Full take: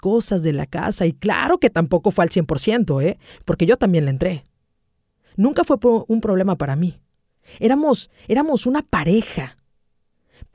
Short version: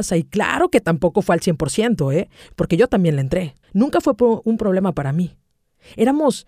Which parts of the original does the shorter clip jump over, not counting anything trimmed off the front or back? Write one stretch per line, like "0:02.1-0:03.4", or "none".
0:04.5-0:05.3